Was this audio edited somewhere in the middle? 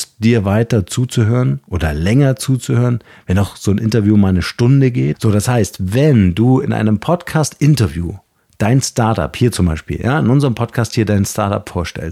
yes; 1 cut; at 5.1 s

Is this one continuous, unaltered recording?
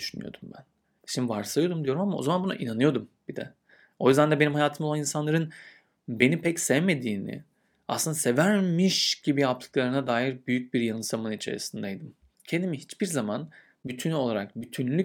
no; 2 cuts; at 1.0 s, 12.3 s

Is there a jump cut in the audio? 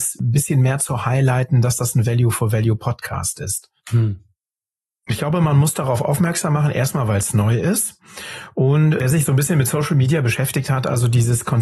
no; 0 cuts

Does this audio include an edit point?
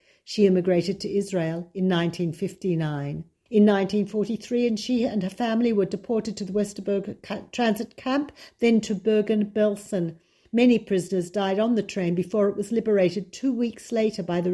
yes; 2 cuts; at 3.5 s, 10.5 s

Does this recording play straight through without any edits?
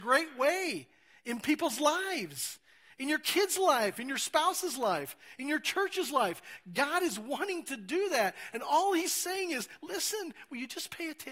yes; 0 cuts

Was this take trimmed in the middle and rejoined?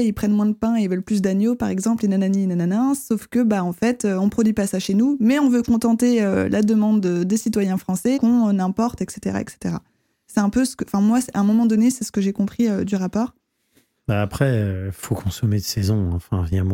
yes; 1 cut; at 8.2 s

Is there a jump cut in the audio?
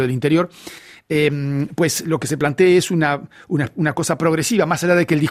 no; 0 cuts

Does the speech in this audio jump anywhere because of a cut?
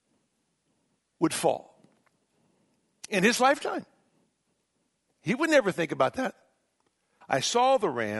yes; 1 cut; at 7.2 s

